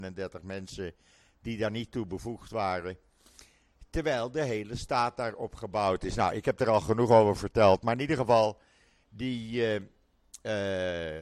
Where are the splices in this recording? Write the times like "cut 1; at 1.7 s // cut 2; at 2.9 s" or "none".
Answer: none